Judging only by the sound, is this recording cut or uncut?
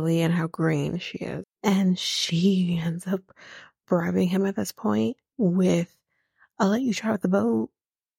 cut